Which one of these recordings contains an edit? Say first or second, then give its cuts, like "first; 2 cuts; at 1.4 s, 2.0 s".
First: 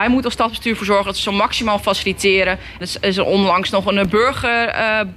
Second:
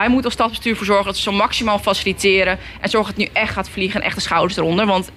first; 1 cut; at 2.8 s